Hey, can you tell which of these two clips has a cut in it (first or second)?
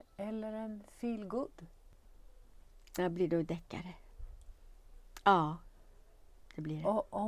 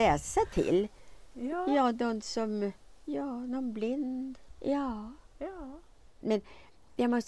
second